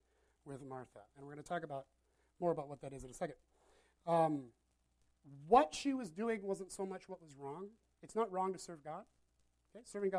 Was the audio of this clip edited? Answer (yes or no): no